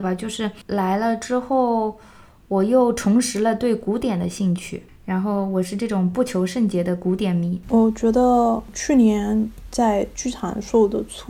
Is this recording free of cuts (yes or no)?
yes